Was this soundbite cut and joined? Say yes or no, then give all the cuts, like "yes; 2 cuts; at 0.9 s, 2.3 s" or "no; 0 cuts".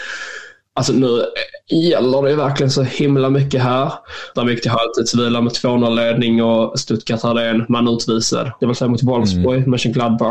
yes; 2 cuts; at 4.3 s, 8.6 s